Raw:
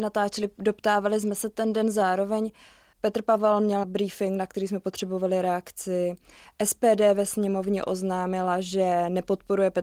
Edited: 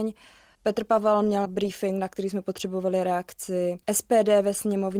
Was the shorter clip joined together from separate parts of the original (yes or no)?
yes